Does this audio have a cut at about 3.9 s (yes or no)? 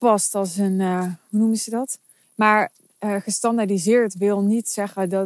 no